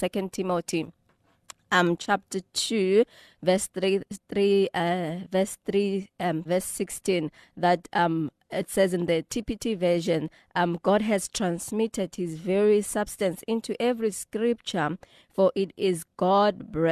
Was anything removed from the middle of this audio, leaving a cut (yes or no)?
yes